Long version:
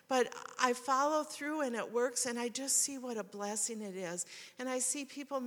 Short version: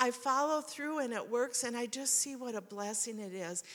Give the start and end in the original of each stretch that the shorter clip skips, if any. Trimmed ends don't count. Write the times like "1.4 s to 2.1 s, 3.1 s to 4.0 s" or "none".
none

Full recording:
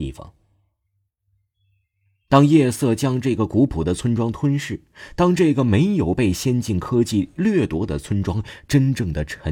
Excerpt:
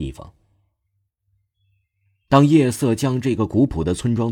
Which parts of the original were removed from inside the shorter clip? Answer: none

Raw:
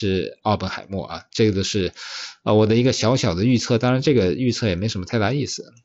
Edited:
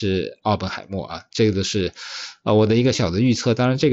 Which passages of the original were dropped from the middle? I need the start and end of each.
2.9 s to 3.2 s

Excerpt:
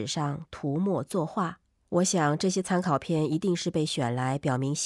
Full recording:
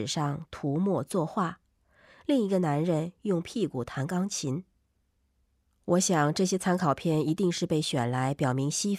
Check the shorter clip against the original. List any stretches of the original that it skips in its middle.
1.9 s to 5.8 s

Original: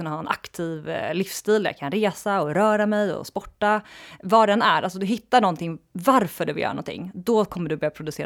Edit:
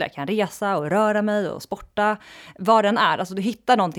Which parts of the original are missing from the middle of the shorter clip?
none

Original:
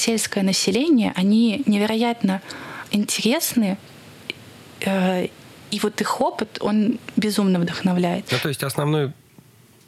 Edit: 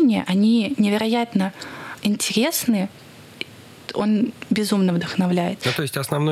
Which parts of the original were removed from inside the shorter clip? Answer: 4.8 s to 6.5 s

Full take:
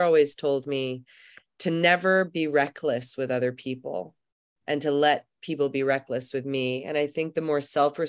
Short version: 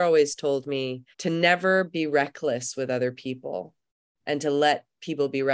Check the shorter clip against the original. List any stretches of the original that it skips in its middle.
1.1 s to 1.5 s

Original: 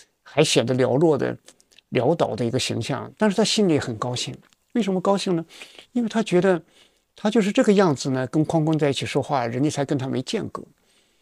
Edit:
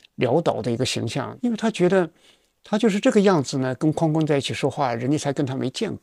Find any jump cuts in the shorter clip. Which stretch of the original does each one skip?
3.1 s to 5.9 s

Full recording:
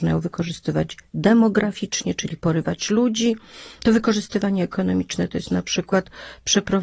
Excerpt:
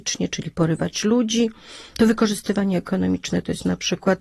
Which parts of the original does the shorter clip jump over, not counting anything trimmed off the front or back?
none

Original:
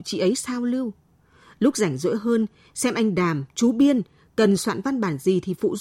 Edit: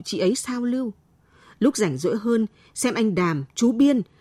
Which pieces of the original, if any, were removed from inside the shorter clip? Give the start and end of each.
none

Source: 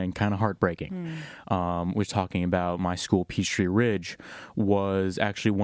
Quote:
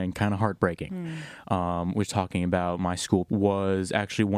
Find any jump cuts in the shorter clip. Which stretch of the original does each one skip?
3.3 s to 4.5 s

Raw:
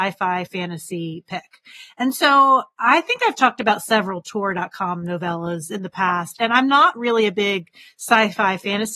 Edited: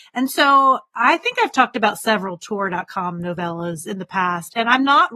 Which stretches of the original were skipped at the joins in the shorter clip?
none

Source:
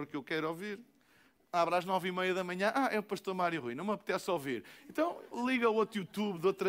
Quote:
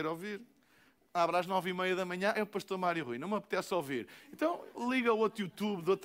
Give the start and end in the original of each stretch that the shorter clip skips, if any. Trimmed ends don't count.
2.7 s to 2.9 s

